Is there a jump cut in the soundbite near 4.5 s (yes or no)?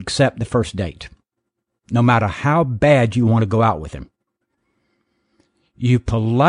no